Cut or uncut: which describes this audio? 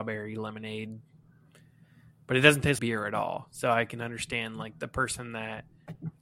cut